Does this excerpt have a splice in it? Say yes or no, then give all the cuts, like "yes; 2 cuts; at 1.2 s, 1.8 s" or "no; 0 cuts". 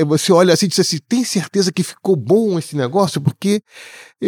no; 0 cuts